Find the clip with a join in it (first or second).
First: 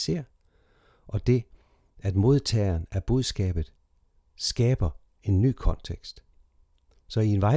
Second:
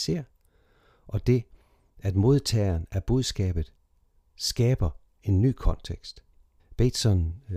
second